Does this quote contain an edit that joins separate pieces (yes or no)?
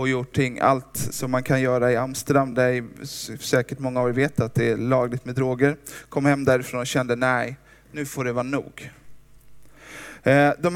no